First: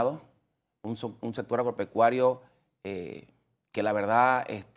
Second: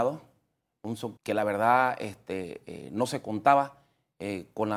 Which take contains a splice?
second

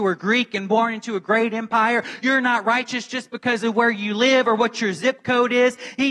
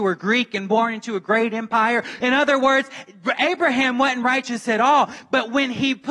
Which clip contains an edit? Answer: second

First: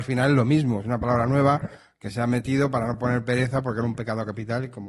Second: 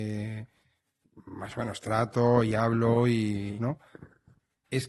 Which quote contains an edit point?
second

